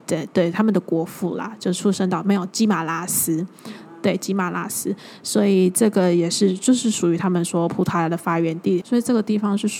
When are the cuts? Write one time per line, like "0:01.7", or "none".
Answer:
0:08.8